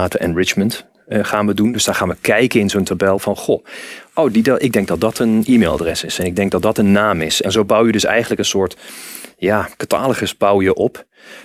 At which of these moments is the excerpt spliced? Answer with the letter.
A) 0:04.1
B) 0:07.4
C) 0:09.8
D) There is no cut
B